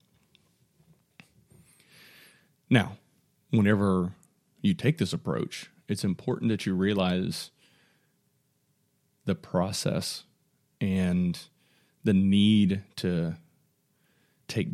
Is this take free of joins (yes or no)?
yes